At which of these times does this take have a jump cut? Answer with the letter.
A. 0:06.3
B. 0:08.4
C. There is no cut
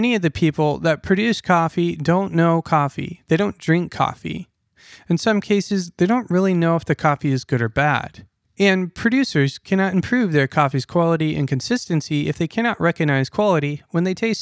B